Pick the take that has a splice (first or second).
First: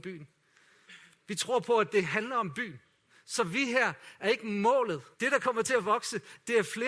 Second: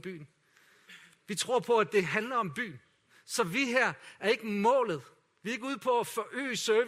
first